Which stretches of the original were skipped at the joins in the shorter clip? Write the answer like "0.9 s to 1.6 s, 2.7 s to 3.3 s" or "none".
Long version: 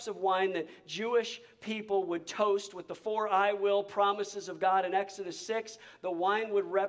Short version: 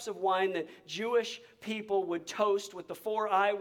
none

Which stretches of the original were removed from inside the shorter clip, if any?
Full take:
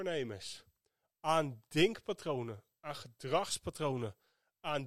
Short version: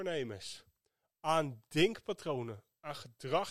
none

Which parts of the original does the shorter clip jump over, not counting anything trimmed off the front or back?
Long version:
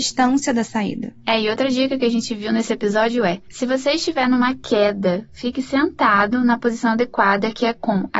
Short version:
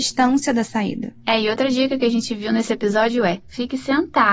3.4 s to 5.3 s

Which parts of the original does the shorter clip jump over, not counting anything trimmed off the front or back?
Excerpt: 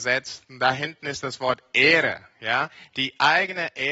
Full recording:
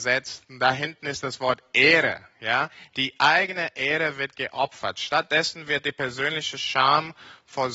none

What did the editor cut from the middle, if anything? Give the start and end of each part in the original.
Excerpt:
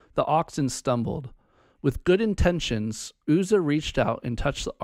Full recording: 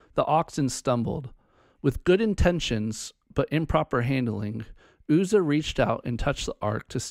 3.2 s to 5.0 s

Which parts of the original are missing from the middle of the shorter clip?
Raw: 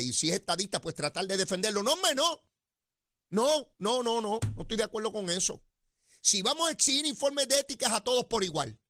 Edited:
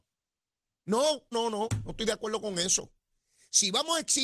3.8 s to 4.0 s

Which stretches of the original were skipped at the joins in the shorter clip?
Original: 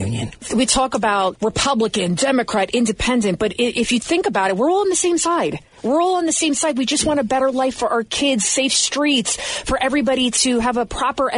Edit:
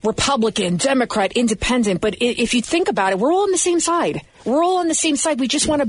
none

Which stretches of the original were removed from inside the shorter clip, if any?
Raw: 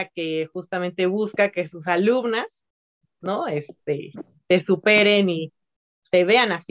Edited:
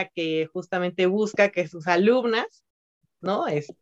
none

